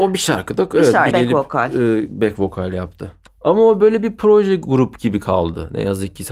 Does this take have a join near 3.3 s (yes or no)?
yes